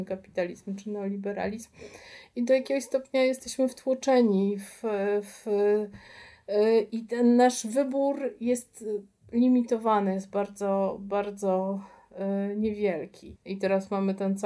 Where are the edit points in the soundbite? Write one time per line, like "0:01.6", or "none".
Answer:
0:13.4